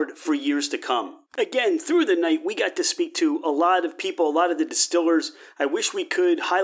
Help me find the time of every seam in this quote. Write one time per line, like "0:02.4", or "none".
none